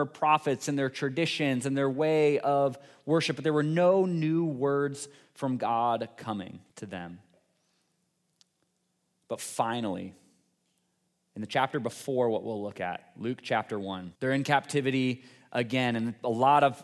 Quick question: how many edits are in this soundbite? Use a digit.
2